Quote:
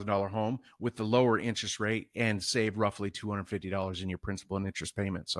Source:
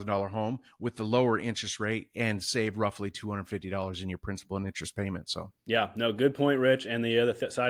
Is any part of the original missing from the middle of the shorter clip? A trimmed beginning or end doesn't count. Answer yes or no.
no